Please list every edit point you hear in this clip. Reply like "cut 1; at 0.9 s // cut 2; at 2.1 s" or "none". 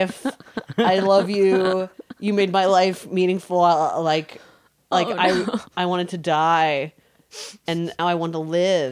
cut 1; at 5.7 s // cut 2; at 8.0 s

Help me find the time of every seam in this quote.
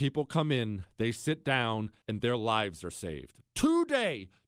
cut 1; at 2.0 s // cut 2; at 3.5 s

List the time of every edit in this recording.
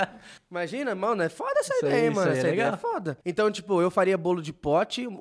cut 1; at 3.2 s

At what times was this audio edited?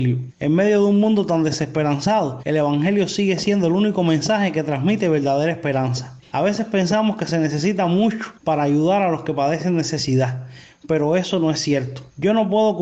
cut 1; at 6.2 s

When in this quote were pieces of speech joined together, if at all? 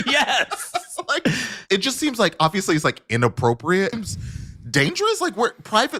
cut 1; at 3.9 s

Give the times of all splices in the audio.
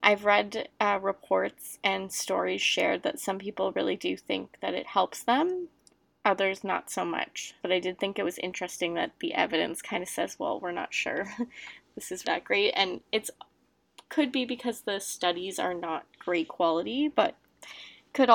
cut 1; at 7.6 s // cut 2; at 12.2 s

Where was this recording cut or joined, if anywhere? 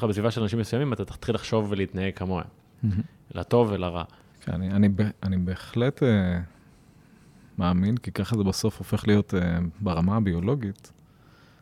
cut 1; at 4.3 s

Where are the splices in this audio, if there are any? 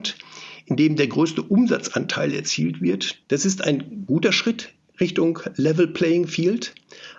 cut 1; at 3.2 s

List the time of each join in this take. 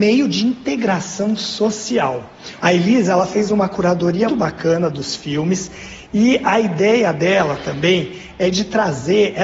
cut 1; at 2.6 s // cut 2; at 4.3 s

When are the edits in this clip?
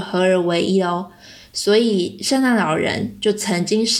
none

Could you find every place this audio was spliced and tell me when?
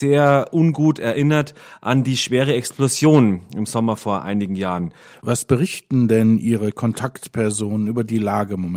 cut 1; at 5.1 s

